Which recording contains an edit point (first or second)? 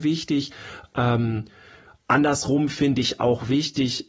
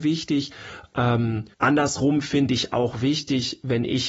second